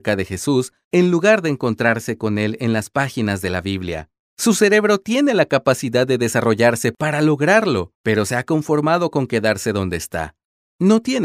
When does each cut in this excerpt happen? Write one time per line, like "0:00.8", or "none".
0:04.3
0:07.9